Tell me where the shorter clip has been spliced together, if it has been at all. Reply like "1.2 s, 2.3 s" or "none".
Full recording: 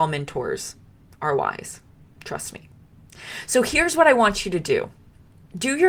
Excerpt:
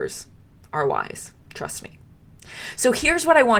1.4 s